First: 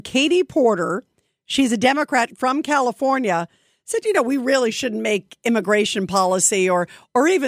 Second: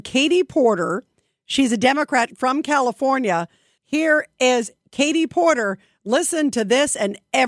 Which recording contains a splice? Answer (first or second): second